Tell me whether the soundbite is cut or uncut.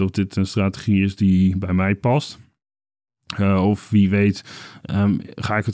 uncut